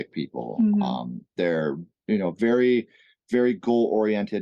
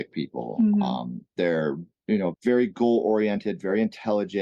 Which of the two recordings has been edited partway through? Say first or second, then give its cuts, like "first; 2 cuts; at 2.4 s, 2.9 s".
second; 1 cut; at 2.3 s